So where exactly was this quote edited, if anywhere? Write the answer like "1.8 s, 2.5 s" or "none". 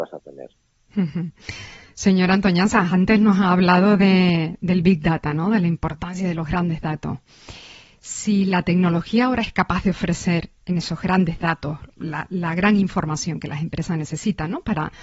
none

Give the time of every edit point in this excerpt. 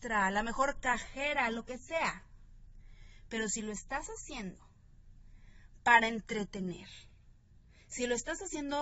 none

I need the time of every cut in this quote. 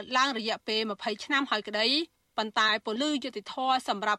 3.0 s

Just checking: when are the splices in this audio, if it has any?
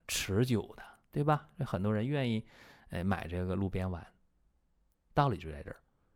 none

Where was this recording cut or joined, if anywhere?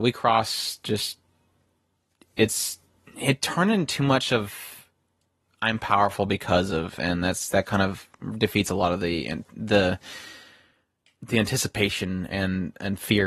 none

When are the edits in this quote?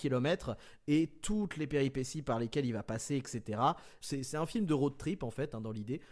4.0 s

